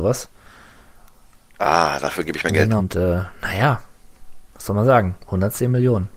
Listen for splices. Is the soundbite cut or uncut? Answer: cut